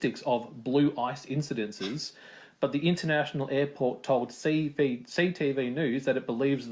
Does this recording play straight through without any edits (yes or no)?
yes